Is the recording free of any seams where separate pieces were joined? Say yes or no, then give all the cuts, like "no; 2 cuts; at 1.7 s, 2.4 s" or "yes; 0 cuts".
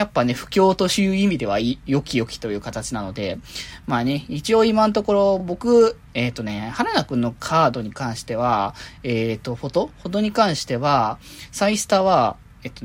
yes; 0 cuts